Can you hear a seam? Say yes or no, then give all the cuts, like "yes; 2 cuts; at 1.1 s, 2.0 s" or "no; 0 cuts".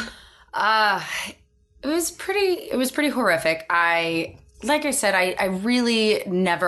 no; 0 cuts